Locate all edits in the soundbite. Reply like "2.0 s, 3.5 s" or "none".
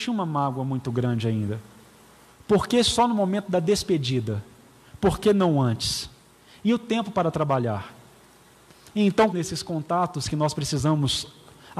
2.3 s, 9.3 s